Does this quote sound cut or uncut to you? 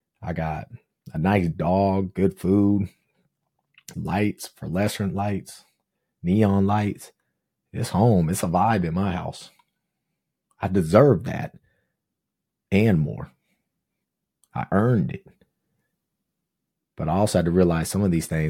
cut